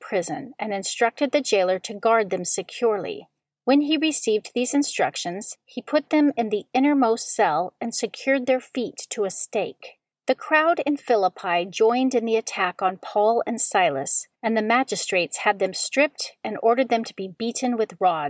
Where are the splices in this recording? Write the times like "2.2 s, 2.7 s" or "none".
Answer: 10.1 s, 14.3 s